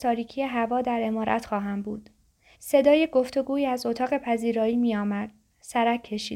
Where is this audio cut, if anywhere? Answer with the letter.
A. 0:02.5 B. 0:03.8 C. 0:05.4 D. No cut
A